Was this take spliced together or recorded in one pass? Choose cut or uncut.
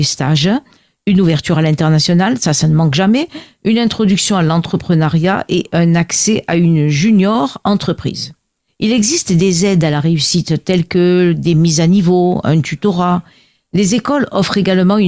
cut